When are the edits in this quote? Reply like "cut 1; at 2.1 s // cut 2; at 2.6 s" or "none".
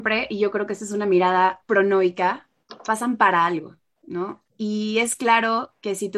cut 1; at 1.6 s